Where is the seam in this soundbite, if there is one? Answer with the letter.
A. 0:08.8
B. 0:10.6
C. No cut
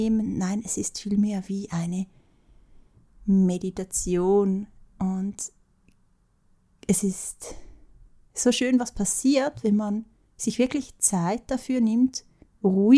C